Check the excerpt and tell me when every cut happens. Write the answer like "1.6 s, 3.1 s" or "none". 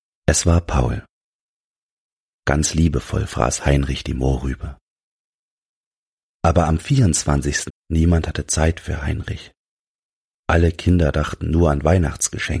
7.7 s

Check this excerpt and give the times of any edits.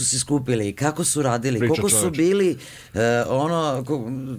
1.6 s

